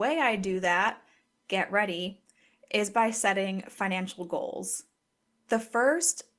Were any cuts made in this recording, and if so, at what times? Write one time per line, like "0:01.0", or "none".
none